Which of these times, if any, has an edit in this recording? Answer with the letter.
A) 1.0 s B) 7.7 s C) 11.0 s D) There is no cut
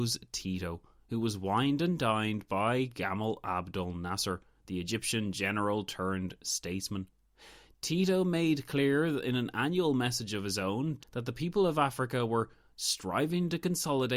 C